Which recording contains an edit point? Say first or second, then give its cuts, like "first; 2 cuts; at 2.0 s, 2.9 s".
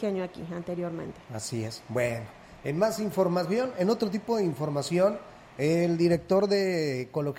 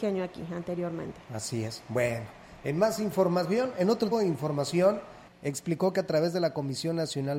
second; 2 cuts; at 4.1 s, 5.3 s